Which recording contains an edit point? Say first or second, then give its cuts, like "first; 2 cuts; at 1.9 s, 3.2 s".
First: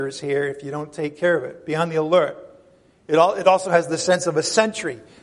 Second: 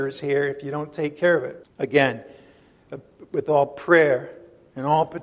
second; 1 cut; at 1.6 s